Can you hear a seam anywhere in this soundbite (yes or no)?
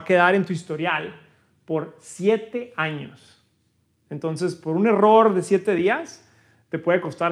no